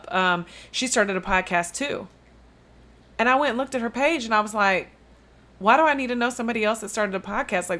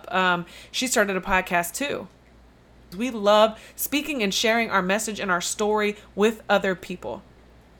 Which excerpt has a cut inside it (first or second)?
second